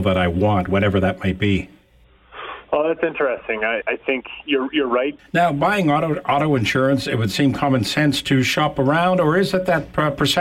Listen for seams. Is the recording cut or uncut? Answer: cut